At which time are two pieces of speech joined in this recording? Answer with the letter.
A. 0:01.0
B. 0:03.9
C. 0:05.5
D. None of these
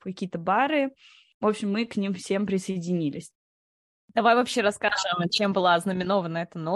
D